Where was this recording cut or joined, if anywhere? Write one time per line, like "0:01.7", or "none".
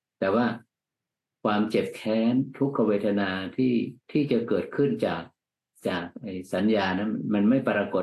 0:04.0